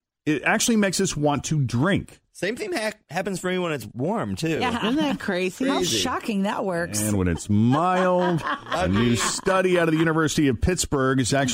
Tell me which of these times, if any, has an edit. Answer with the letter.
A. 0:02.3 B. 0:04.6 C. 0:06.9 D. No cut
D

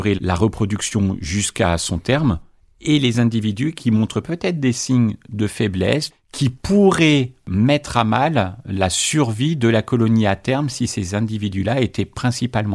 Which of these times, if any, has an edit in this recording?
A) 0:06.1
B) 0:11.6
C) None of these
A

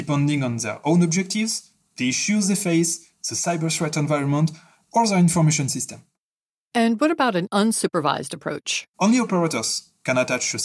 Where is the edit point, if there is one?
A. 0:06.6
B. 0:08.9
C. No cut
B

